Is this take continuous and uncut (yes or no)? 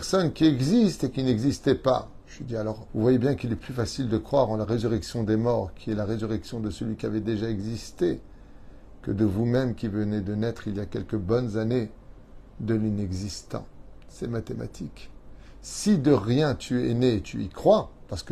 no